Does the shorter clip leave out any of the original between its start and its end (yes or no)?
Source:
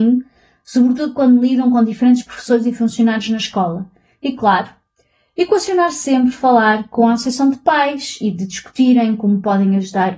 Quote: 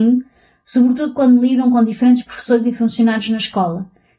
no